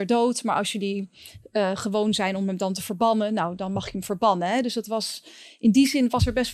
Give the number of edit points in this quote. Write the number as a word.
zero